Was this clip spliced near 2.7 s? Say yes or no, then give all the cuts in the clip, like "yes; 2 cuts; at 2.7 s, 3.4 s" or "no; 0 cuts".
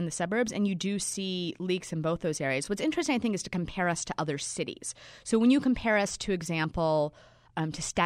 no; 0 cuts